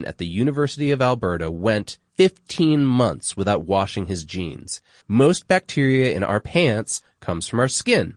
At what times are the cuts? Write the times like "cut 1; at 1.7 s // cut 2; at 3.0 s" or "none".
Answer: cut 1; at 2.1 s // cut 2; at 5.0 s

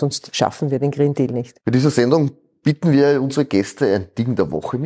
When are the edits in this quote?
none

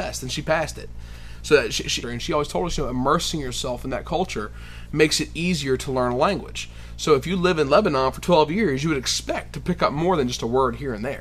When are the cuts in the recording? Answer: cut 1; at 2.0 s

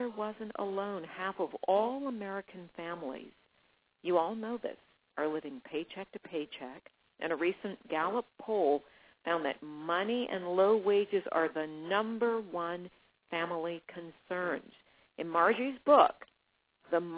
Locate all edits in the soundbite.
none

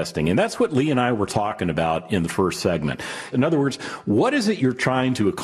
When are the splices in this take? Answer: cut 1; at 3.3 s

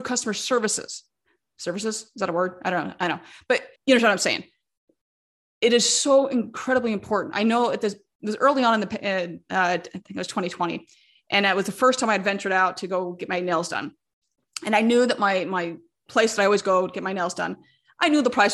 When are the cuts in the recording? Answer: cut 1; at 3.8 s

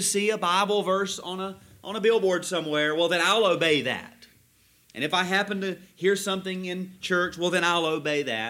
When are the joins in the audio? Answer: none

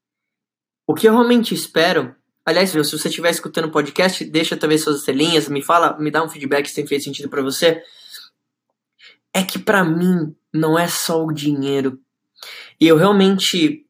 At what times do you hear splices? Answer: cut 1; at 2.7 s

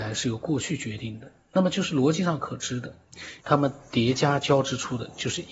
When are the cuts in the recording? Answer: cut 1; at 3.4 s

